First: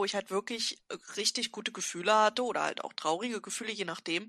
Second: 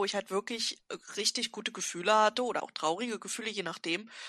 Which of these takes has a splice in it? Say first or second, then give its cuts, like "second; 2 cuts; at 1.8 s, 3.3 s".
second; 1 cut; at 2.6 s